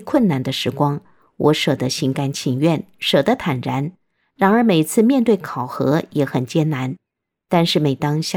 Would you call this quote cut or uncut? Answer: uncut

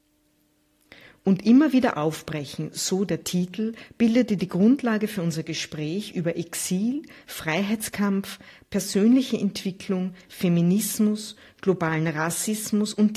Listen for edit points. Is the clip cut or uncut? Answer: uncut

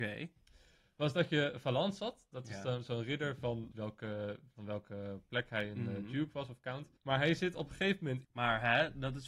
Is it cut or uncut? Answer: cut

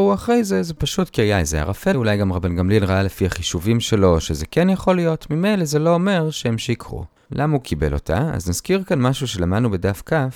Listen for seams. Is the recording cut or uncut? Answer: cut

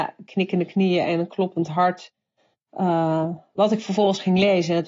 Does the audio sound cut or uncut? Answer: uncut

